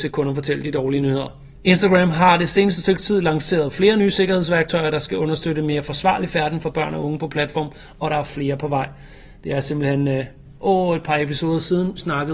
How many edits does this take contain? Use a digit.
1